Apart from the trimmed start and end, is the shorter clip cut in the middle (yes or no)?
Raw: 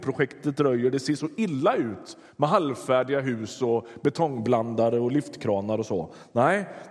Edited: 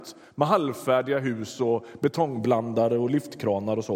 no